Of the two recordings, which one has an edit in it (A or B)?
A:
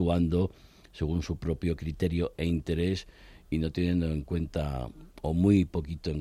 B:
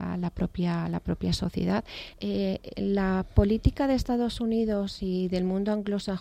B